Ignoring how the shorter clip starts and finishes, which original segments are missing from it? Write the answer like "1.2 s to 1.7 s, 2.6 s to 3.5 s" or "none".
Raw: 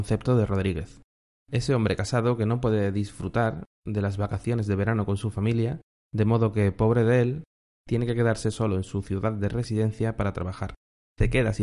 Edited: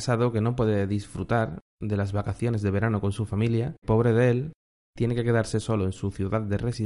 5.9 s to 6.7 s